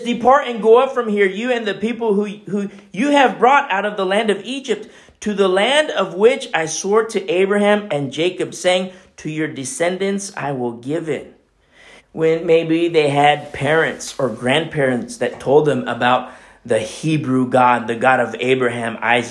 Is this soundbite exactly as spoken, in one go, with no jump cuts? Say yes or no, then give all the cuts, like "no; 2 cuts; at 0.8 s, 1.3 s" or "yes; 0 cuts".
no; 2 cuts; at 7.9 s, 12.0 s